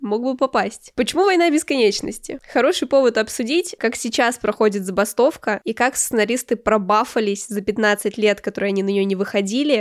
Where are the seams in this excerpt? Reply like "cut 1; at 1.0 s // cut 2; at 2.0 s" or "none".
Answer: none

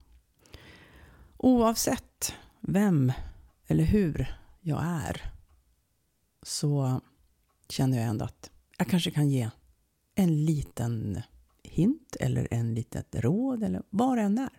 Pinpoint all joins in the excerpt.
none

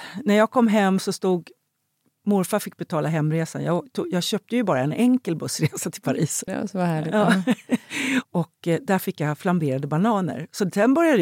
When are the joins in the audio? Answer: cut 1; at 6.5 s // cut 2; at 8.2 s

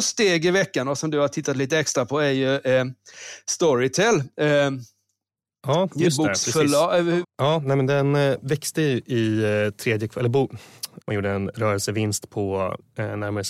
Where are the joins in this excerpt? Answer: cut 1; at 7.2 s // cut 2; at 11.0 s

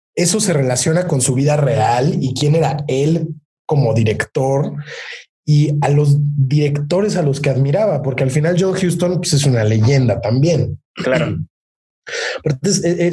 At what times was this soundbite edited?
none

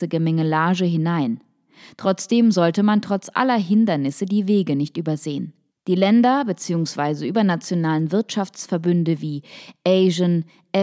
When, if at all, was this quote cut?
cut 1; at 5.7 s

